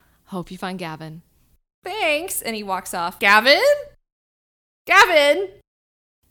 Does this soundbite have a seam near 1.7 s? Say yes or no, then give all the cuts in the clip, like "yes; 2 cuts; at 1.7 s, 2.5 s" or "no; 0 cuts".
no; 1 cut; at 3.2 s